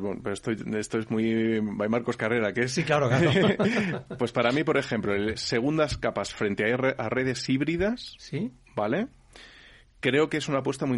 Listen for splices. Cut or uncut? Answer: cut